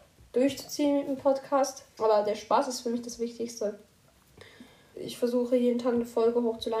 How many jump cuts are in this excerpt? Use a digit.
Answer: 2